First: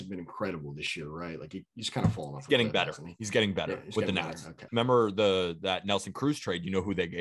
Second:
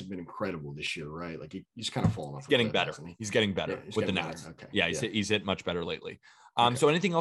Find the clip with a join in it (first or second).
first